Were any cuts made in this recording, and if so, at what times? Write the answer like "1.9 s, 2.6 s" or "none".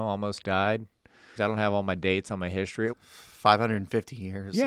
1.4 s, 2.9 s